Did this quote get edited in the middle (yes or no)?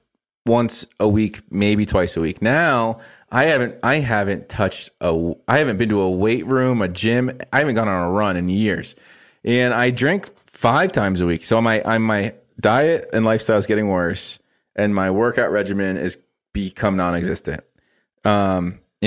no